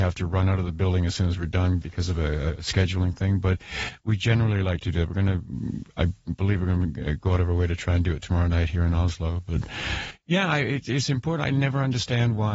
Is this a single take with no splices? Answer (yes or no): yes